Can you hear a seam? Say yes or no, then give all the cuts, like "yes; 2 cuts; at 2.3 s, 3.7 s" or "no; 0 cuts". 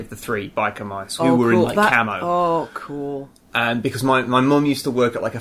yes; 1 cut; at 1.2 s